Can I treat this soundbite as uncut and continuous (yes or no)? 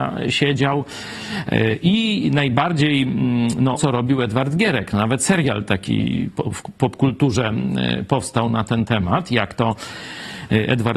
no